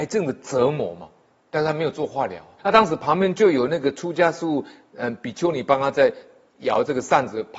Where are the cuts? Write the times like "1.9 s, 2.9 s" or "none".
2.6 s